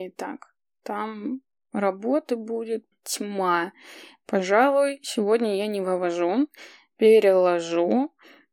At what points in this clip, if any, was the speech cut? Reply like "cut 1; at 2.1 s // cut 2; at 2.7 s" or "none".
cut 1; at 2.9 s